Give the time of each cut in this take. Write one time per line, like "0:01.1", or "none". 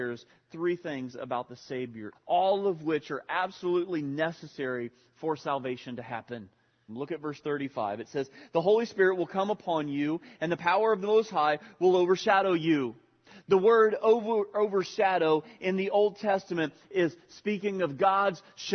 0:02.1
0:06.9